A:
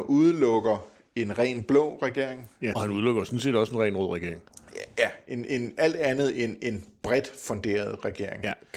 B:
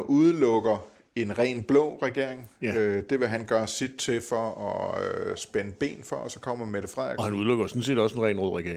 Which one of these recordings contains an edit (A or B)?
A